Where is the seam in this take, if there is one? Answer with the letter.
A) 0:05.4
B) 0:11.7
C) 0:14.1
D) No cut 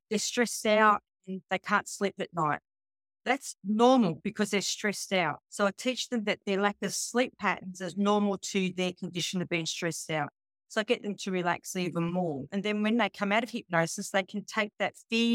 A